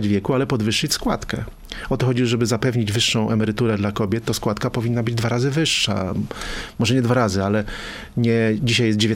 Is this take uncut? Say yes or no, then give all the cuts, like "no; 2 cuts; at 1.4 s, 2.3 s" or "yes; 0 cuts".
yes; 0 cuts